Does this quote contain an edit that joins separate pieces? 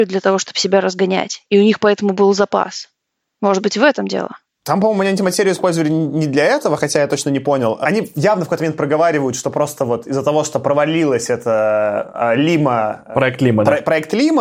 no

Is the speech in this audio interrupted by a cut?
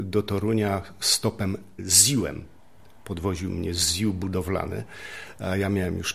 no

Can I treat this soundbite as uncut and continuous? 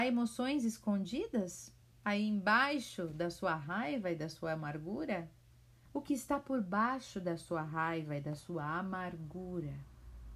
no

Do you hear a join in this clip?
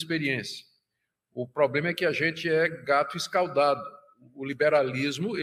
no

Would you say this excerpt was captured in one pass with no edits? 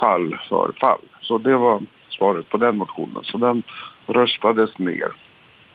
yes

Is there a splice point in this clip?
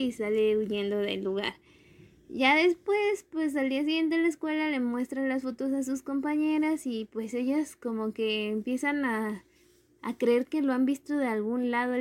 no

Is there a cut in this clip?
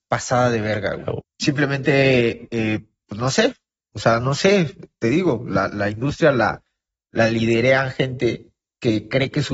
yes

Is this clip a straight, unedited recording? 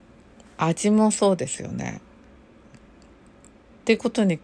no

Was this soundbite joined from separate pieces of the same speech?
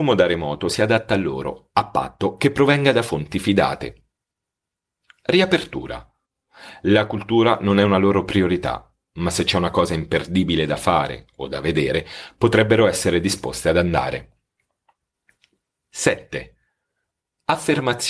no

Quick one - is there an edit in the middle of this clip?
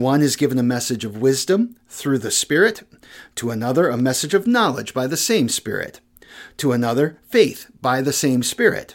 no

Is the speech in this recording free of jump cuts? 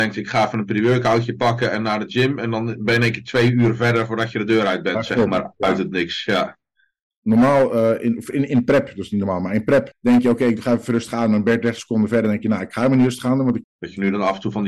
no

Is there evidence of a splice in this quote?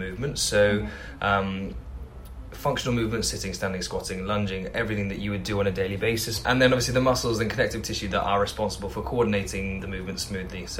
yes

